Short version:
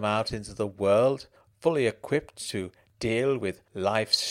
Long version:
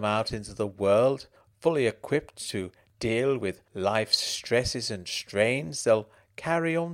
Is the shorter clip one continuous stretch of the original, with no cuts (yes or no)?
yes